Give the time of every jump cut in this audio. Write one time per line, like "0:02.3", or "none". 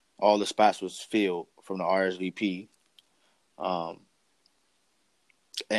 none